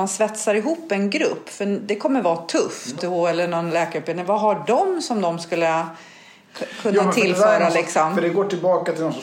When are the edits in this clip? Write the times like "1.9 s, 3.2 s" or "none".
3.0 s